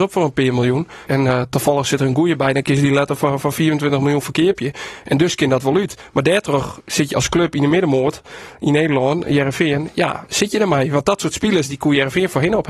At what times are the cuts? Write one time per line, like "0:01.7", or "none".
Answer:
0:01.1